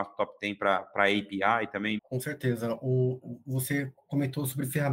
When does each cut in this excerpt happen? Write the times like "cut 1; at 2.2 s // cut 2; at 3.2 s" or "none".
cut 1; at 2.0 s